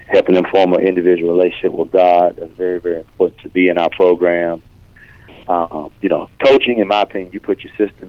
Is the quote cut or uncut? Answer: uncut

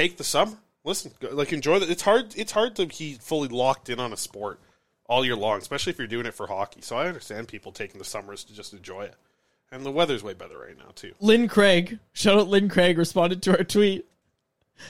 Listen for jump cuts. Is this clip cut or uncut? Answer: uncut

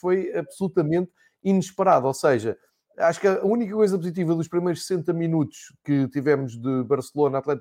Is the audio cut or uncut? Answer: uncut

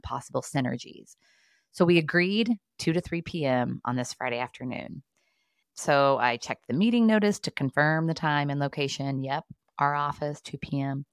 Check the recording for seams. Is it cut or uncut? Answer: cut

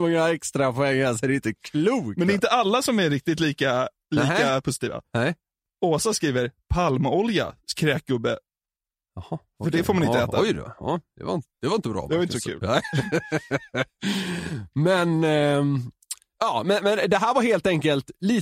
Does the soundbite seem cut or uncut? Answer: uncut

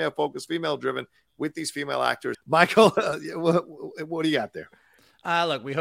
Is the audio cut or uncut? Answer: cut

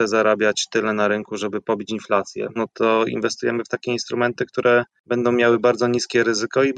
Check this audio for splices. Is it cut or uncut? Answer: cut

